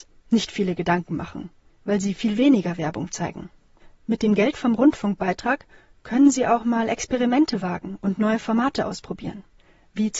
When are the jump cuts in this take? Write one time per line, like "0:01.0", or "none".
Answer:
none